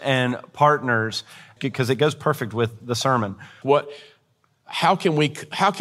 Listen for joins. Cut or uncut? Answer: cut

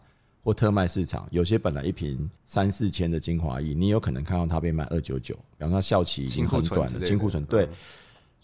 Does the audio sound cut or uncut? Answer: cut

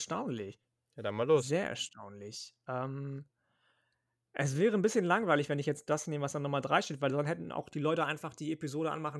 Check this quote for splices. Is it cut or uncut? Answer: uncut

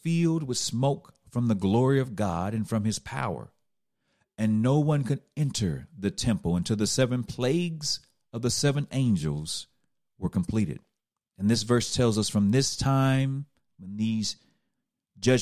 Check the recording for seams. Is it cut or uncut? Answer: cut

